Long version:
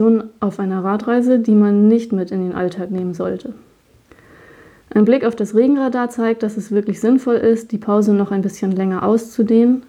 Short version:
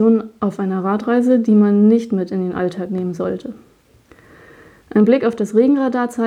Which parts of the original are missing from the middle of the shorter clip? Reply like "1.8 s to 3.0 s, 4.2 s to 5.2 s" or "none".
none